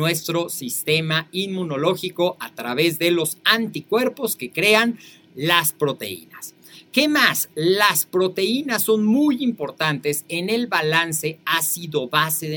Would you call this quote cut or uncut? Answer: uncut